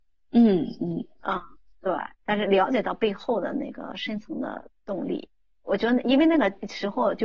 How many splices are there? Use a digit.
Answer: 1